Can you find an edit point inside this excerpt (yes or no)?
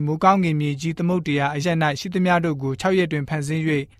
yes